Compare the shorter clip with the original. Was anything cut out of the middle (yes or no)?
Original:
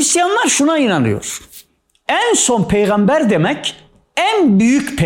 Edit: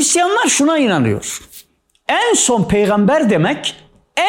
no